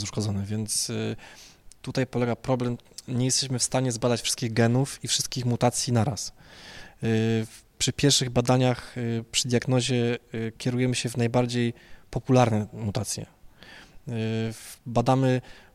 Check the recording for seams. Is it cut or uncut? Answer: uncut